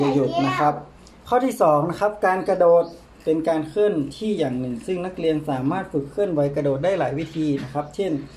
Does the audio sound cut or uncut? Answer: uncut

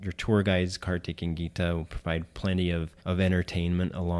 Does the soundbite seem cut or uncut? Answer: cut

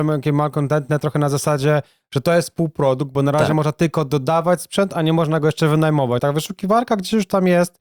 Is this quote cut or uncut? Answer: cut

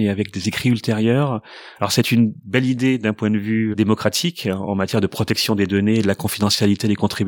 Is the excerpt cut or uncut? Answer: cut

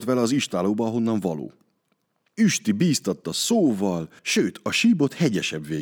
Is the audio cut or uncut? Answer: cut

